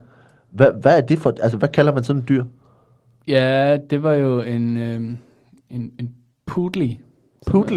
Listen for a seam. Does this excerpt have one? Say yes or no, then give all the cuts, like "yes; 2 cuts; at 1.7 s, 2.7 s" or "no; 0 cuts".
no; 0 cuts